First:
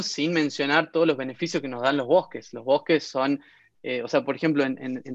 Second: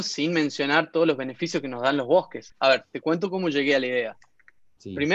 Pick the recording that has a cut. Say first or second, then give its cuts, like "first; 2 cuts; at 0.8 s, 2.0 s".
second; 1 cut; at 2.5 s